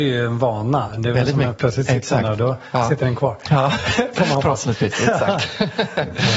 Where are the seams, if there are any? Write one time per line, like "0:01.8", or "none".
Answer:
0:01.5